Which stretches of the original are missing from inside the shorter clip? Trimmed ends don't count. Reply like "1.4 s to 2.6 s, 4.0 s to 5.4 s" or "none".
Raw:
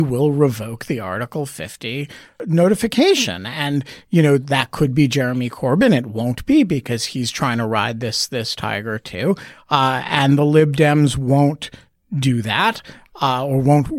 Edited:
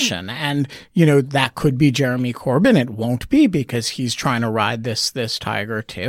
none